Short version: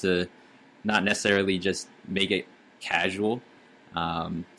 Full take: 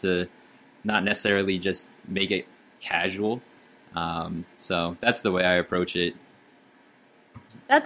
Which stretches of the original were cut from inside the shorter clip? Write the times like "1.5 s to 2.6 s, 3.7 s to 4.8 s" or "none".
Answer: none